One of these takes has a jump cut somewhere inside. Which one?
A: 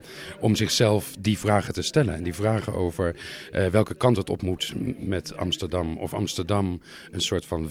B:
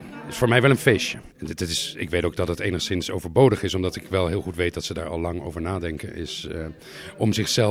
B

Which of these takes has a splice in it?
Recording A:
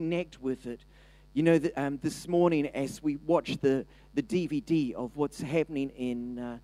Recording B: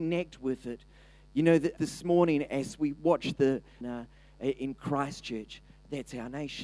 B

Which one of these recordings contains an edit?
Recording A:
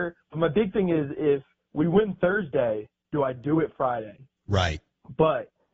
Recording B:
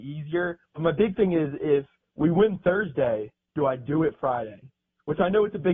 A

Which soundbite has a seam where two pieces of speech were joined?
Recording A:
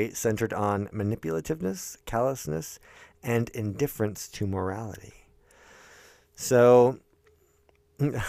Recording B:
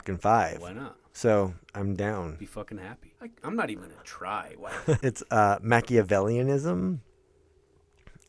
B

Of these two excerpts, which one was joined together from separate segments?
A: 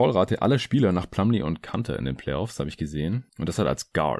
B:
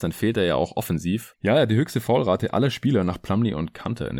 B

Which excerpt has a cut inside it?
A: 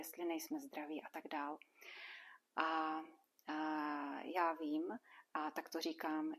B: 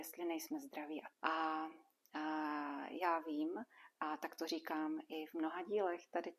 B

